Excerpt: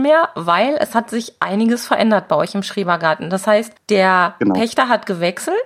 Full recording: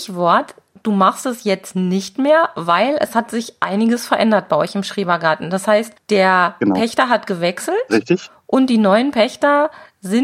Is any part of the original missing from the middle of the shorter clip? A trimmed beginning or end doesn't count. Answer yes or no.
no